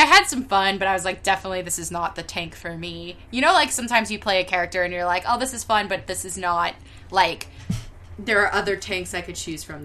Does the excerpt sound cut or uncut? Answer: uncut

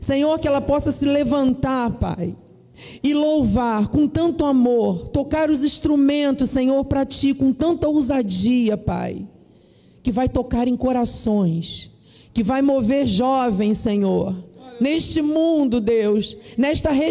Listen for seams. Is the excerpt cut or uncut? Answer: uncut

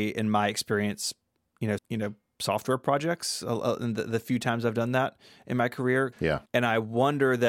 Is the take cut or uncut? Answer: cut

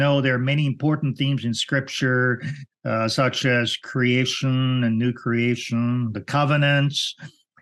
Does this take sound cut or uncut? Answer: uncut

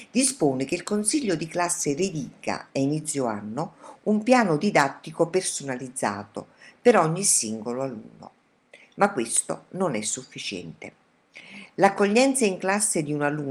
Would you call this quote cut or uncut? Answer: uncut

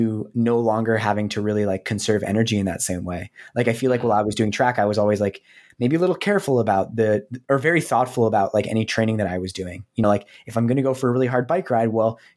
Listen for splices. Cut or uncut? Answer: uncut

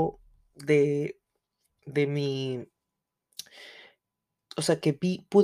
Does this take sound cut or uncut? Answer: uncut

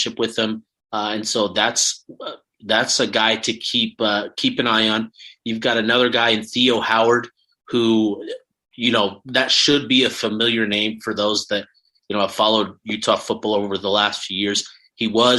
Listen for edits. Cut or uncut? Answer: uncut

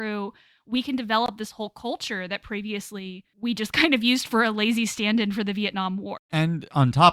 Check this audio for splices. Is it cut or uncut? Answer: cut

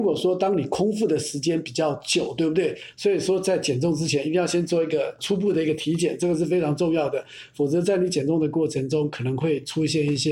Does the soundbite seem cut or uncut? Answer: cut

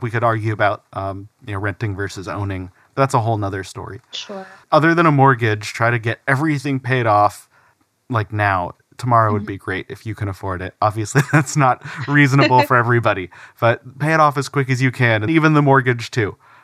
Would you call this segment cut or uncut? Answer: cut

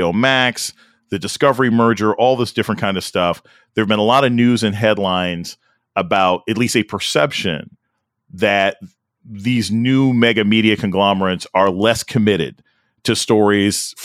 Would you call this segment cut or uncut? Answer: uncut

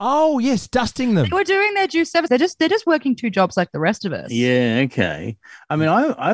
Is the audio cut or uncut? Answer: cut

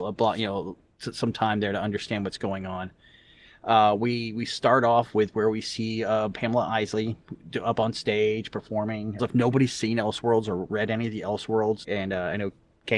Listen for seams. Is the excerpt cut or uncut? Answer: cut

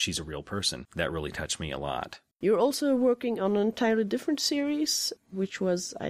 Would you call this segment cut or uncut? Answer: cut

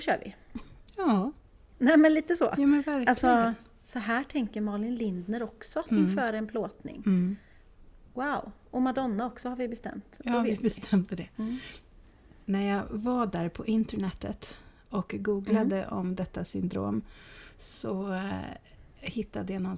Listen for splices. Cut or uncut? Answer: uncut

